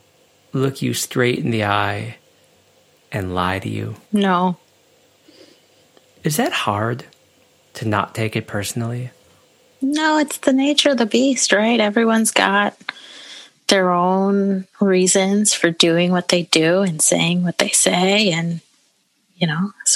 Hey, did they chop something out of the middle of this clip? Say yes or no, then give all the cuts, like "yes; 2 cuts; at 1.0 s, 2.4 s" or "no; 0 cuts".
yes; 1 cut; at 4.0 s